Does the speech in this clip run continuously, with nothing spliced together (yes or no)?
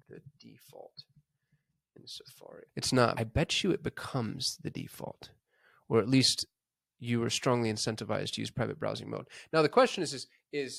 yes